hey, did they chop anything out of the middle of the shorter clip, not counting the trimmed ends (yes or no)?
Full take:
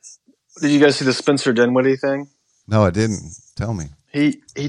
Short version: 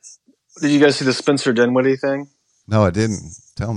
no